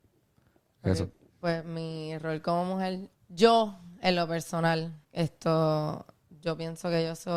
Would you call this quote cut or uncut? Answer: cut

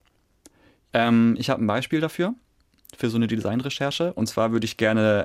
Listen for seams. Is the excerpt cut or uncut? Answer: uncut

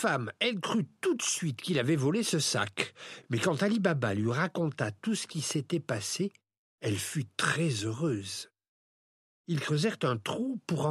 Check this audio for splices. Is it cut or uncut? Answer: uncut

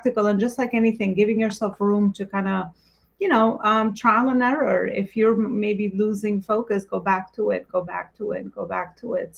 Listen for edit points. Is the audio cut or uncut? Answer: uncut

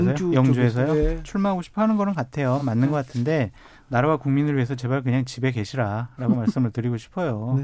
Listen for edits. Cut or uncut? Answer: uncut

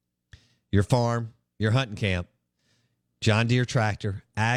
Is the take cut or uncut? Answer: uncut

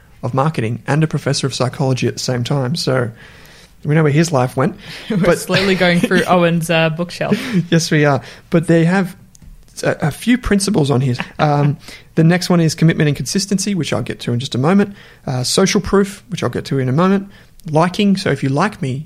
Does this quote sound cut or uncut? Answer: cut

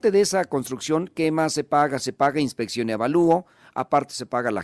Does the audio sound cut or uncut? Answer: uncut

